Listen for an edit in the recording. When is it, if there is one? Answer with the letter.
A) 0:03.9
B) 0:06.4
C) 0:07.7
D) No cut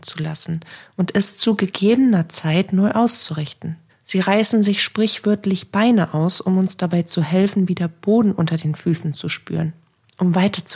A